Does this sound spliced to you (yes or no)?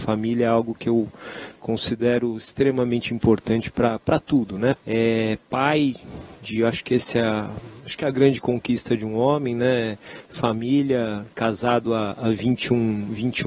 yes